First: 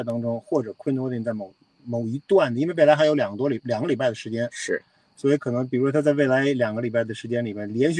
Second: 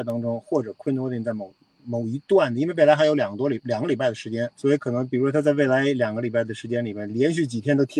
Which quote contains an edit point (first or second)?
second